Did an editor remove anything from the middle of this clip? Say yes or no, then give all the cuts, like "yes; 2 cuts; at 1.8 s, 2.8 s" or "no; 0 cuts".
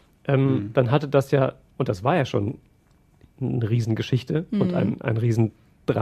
no; 0 cuts